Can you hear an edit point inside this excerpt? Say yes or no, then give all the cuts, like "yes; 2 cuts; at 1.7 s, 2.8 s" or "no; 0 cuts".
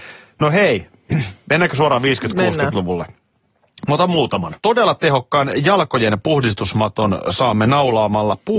yes; 1 cut; at 4.6 s